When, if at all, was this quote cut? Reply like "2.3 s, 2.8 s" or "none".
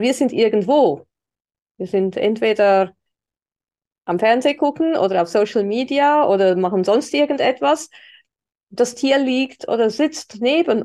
none